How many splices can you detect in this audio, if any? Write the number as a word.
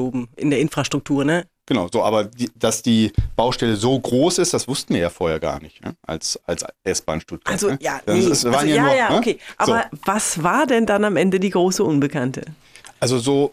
zero